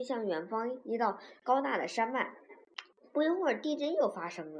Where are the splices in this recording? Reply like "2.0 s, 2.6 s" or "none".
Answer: none